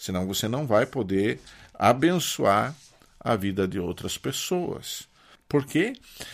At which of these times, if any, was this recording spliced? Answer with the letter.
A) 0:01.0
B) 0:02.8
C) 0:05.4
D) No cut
C